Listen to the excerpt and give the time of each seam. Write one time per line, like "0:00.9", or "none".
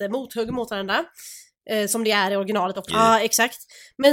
0:02.9